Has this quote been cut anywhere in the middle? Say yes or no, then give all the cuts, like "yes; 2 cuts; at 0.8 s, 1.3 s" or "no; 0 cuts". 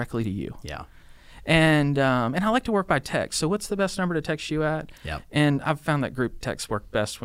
no; 0 cuts